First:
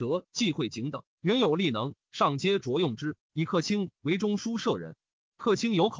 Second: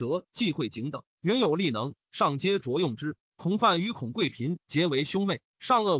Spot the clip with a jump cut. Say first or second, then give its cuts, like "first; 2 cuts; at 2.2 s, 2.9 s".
second; 1 cut; at 3.2 s